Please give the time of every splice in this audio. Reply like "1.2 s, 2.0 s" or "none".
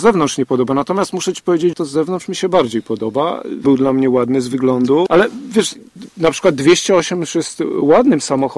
1.7 s, 3.6 s, 5.1 s